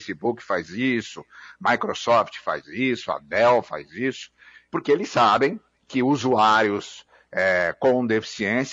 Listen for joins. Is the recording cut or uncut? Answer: uncut